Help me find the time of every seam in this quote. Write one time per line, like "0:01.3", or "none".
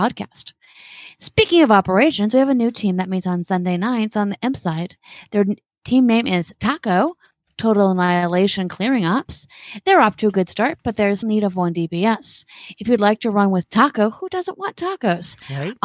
0:11.2